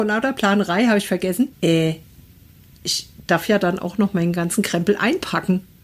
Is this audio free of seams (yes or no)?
no